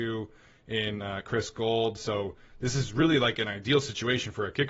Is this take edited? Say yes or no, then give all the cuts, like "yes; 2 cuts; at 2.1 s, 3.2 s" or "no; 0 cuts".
no; 0 cuts